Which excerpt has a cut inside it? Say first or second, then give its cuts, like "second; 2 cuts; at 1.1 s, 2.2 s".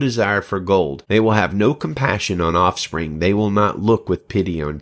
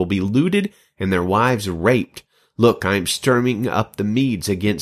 first; 1 cut; at 1.0 s